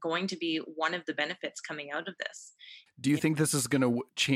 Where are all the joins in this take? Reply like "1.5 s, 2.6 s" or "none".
2.9 s